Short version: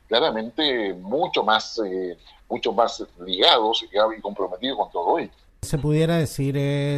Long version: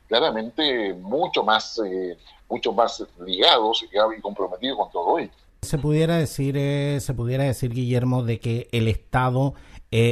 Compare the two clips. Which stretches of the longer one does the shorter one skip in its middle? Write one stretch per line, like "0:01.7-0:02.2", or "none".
none